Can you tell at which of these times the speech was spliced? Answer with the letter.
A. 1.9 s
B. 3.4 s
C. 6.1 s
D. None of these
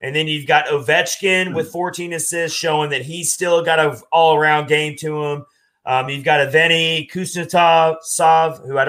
D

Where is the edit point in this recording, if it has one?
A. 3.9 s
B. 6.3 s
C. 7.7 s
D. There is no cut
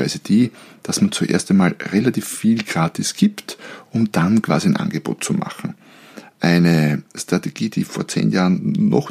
D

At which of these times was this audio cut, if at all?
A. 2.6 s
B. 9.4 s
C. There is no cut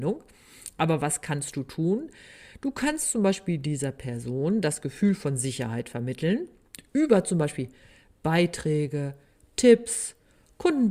C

